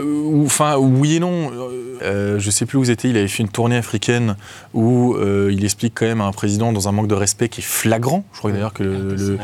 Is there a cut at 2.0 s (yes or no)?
yes